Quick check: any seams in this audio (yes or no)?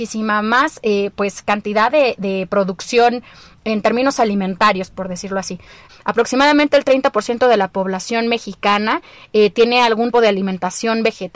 yes